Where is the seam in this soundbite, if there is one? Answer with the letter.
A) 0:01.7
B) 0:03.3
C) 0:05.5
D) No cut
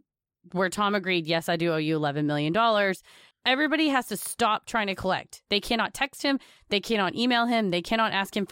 B